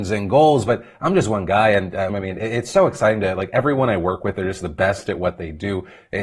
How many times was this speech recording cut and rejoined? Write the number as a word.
one